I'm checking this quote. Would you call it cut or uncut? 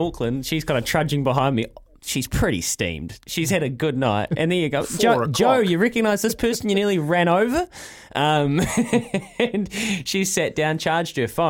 cut